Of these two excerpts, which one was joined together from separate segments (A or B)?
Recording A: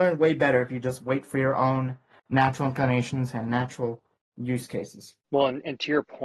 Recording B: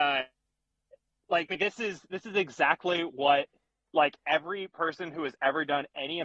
A